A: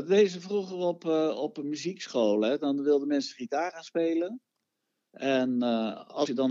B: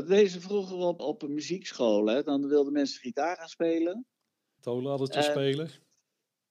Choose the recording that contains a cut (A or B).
B